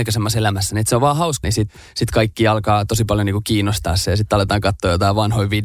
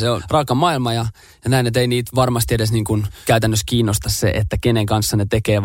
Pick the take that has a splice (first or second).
first